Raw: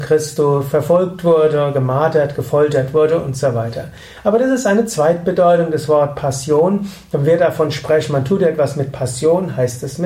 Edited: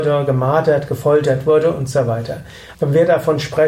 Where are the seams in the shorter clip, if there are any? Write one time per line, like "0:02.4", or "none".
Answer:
0:02.7